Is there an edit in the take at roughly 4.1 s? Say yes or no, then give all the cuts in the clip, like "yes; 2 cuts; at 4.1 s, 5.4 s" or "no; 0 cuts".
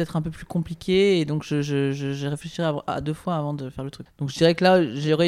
yes; 1 cut; at 4.1 s